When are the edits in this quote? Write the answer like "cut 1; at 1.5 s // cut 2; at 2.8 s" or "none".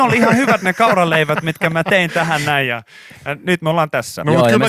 none